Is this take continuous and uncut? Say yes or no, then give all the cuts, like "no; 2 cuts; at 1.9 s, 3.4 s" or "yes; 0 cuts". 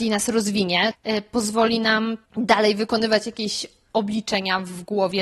no; 2 cuts; at 0.9 s, 2.3 s